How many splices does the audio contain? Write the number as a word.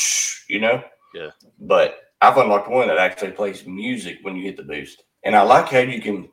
one